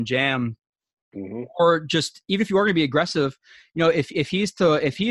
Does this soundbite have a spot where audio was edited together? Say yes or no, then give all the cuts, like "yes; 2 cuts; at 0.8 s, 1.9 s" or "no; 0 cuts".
no; 0 cuts